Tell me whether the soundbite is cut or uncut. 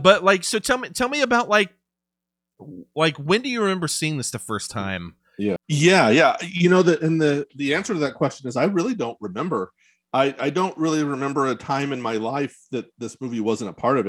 cut